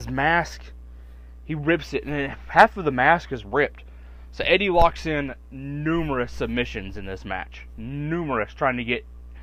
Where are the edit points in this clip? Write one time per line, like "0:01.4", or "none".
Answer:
none